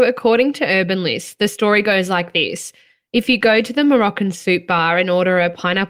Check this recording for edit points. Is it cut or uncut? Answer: uncut